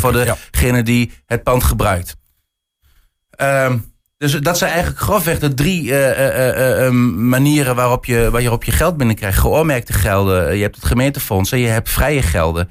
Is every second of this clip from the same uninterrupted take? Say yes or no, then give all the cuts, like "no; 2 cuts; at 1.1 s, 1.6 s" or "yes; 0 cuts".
yes; 0 cuts